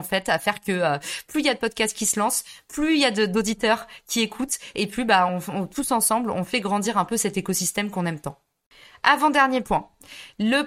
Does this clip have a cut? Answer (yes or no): no